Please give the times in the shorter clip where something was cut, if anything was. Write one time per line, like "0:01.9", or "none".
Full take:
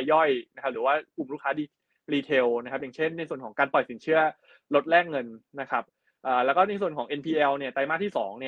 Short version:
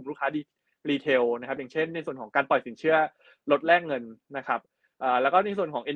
none